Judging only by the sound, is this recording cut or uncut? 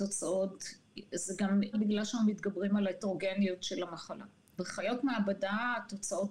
cut